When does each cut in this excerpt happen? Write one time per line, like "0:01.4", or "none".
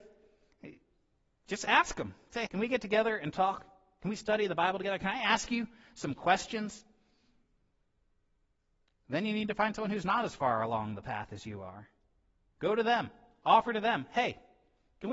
0:02.5

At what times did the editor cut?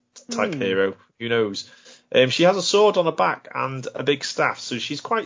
none

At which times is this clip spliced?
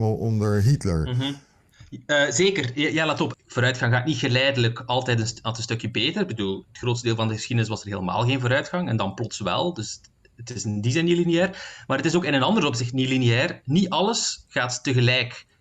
0:03.3

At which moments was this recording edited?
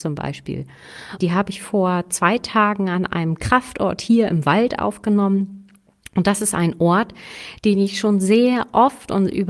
0:01.2

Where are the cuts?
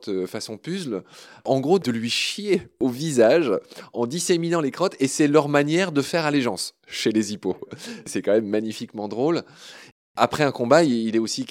none

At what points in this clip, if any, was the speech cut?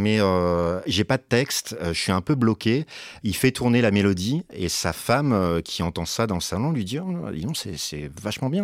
0:03.2

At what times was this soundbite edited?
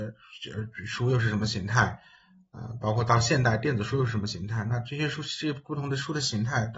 none

